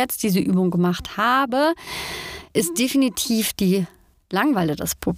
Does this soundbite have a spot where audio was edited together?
no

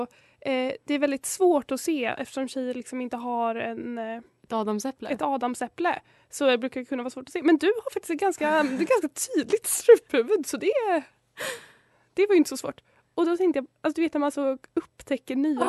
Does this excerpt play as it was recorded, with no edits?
yes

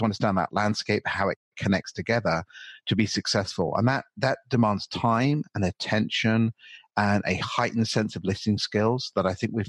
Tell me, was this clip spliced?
no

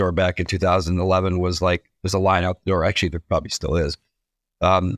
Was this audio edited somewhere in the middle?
no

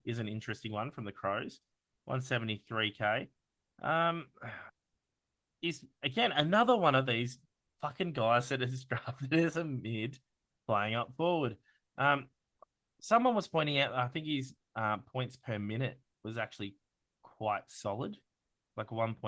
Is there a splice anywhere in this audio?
no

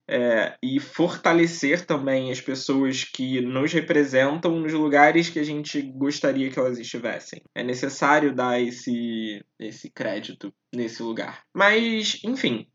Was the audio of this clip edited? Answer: no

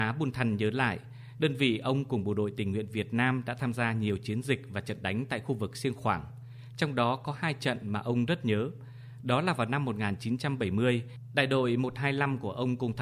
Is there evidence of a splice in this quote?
yes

